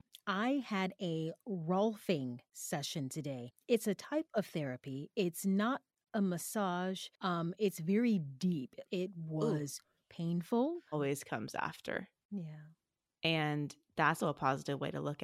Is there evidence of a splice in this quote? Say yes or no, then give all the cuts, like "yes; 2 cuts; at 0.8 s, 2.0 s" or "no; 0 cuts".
yes; 3 cuts; at 8.8 s, 10.9 s, 14.2 s